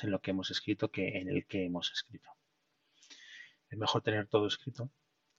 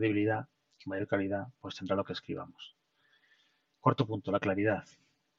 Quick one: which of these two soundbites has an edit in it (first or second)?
first